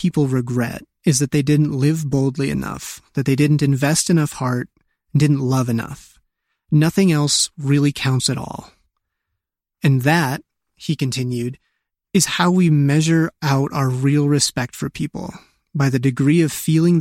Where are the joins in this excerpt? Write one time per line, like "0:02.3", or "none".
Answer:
none